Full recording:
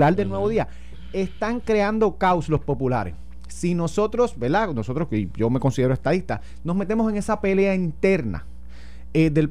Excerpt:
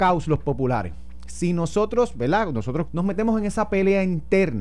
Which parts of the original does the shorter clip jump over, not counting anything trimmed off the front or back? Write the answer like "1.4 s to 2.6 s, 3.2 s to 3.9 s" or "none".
5.1 s to 6.6 s